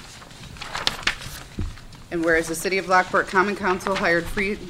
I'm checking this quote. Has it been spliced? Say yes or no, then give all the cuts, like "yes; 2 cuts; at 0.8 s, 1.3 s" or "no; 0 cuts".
no; 0 cuts